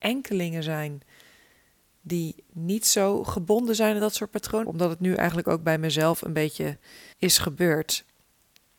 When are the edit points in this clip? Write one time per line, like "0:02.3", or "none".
0:04.6
0:07.1